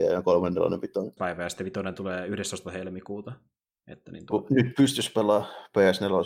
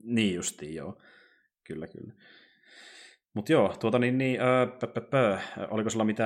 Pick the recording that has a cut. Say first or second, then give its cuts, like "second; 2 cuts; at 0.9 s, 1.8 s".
first; 1 cut; at 1.2 s